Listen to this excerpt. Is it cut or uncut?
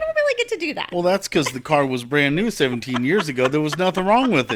uncut